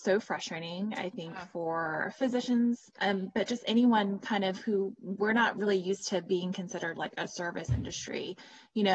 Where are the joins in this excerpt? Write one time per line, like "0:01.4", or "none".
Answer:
none